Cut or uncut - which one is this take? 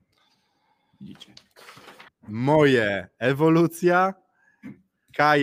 cut